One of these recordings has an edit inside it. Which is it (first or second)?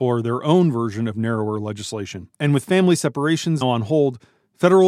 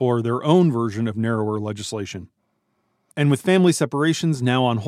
first